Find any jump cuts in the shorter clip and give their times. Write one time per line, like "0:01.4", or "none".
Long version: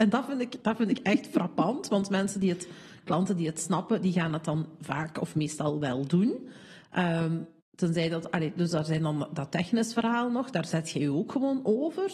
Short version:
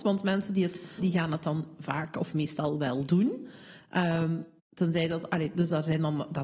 0:01.0